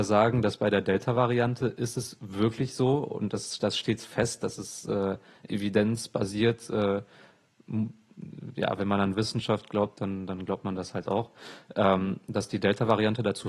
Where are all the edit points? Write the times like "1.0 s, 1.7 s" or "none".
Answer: none